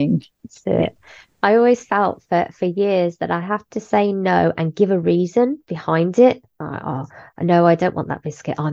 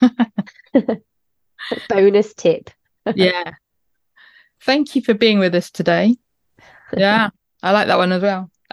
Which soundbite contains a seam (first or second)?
second